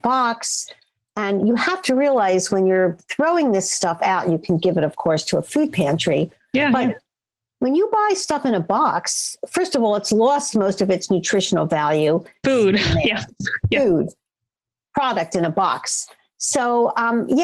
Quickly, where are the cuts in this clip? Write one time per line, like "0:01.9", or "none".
0:12.4